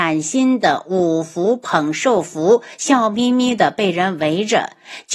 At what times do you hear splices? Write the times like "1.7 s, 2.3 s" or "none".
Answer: none